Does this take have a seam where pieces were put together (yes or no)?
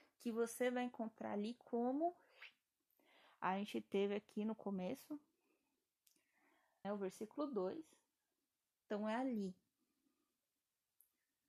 yes